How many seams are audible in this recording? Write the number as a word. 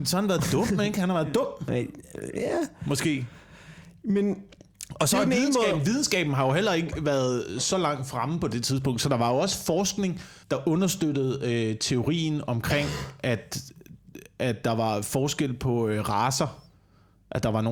one